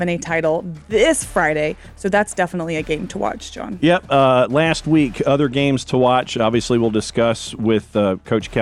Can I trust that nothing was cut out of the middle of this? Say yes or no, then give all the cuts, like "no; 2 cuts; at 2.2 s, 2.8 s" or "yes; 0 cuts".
yes; 0 cuts